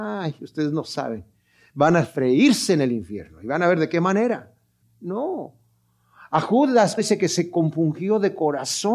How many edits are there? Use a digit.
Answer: 2